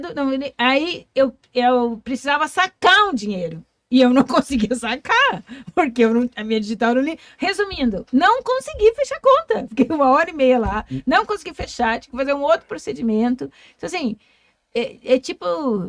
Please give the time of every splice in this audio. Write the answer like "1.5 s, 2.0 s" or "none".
none